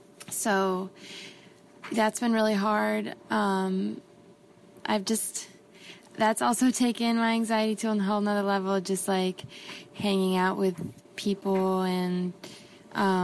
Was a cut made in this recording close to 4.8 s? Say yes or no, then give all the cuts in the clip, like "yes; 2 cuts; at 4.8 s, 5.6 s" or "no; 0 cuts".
yes; 2 cuts; at 4.8 s, 11.1 s